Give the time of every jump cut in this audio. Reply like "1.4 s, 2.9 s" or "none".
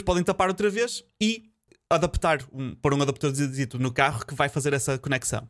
none